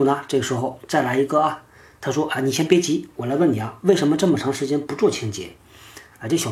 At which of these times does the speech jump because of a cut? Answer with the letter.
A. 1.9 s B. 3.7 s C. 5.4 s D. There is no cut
D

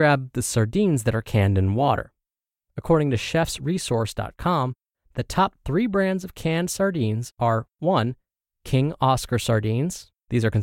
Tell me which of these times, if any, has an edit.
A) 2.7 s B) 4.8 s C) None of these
C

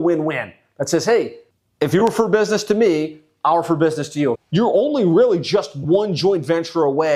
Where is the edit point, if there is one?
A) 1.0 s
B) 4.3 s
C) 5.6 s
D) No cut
B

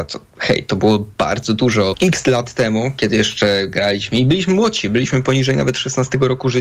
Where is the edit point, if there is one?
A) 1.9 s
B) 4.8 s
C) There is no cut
A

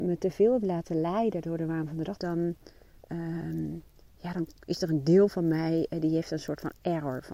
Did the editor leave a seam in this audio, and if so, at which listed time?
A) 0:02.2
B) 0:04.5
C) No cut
A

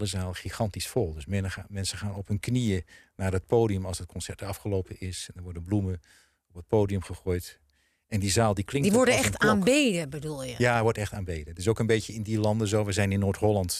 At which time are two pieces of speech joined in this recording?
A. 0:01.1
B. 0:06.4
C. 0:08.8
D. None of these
D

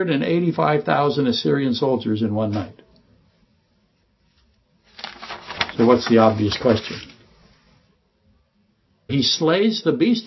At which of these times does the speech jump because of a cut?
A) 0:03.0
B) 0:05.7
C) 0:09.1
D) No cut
C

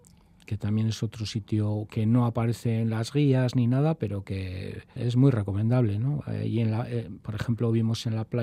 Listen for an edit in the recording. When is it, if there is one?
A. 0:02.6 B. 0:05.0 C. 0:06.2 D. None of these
B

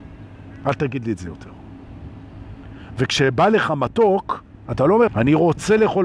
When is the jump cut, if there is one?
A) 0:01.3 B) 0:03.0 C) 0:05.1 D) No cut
C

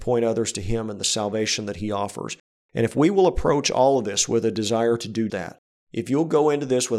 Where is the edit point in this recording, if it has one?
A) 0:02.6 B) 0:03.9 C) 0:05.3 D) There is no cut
C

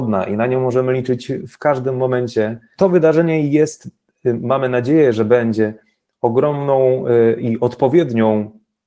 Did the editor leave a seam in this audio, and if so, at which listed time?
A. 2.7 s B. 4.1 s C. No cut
A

